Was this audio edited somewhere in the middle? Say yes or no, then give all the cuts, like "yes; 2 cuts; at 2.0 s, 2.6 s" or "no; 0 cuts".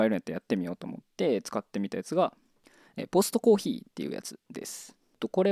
no; 0 cuts